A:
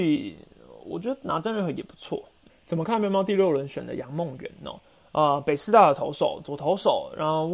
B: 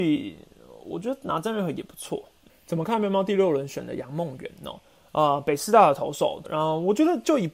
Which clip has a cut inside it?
B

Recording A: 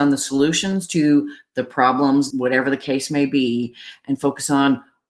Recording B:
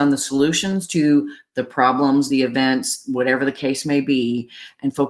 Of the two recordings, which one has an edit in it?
A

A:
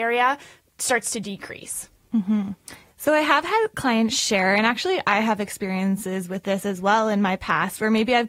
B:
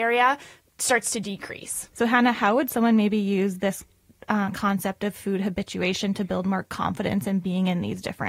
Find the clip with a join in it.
B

